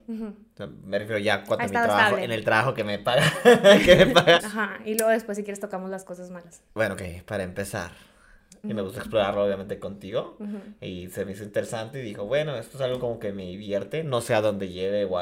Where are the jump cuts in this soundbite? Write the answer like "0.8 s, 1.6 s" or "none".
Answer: 4.4 s, 8.6 s